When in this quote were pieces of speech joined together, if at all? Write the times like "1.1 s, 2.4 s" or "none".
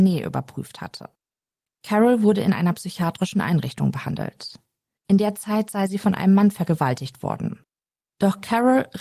1.7 s, 5.0 s